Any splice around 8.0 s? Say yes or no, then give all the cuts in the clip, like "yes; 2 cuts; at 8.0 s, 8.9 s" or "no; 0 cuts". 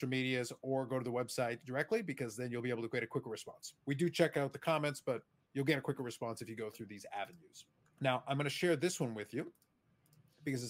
yes; 1 cut; at 8.0 s